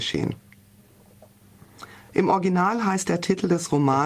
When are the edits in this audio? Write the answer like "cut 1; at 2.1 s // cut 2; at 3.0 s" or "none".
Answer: none